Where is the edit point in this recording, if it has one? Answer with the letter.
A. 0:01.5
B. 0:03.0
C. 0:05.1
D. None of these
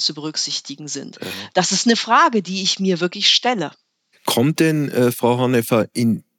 A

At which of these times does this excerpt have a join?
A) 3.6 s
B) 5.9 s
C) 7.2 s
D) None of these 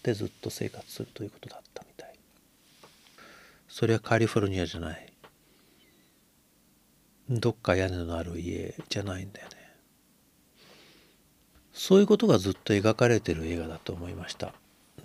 A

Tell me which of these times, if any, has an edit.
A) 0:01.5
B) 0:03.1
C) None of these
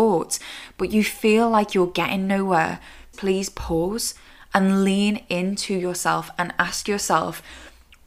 B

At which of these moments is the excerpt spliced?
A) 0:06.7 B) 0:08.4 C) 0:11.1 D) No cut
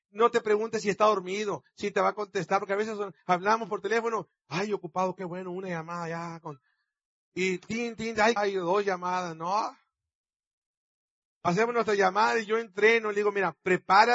B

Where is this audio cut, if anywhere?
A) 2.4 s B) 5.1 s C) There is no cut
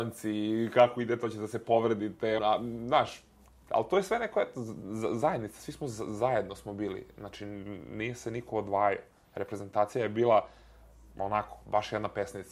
A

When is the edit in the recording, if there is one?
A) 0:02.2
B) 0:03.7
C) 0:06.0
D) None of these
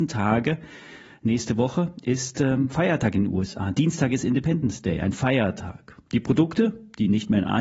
C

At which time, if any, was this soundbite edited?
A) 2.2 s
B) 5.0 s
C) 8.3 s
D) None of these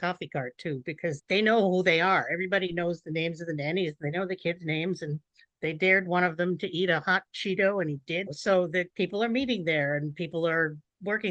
C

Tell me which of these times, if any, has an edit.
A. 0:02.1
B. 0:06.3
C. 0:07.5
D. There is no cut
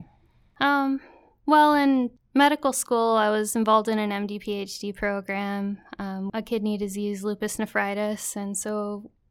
B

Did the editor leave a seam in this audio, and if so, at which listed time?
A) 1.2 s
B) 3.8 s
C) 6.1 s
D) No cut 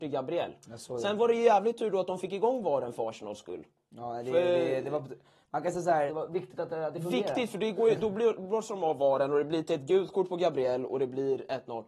C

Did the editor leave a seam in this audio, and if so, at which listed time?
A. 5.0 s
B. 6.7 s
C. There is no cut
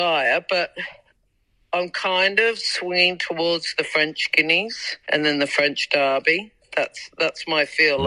A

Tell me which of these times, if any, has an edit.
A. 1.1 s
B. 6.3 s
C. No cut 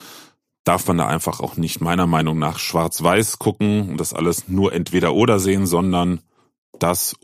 C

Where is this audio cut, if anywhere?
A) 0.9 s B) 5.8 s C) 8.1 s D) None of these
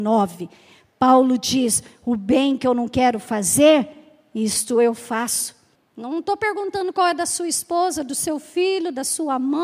B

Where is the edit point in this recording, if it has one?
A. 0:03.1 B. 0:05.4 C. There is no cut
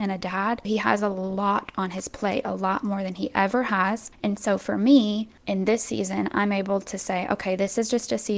B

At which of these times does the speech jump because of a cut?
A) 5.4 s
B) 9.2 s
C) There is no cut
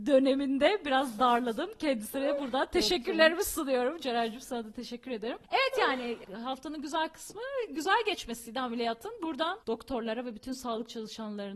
A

